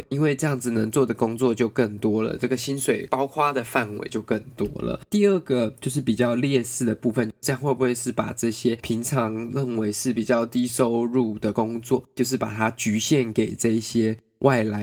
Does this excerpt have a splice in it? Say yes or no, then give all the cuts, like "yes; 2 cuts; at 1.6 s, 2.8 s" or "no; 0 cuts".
no; 0 cuts